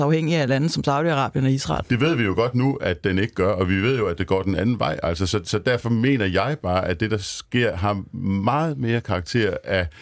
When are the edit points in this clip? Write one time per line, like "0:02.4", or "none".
0:01.8